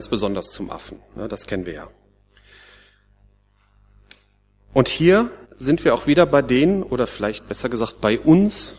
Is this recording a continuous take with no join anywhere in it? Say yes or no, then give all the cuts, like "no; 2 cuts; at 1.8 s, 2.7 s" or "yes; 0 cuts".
no; 1 cut; at 5.4 s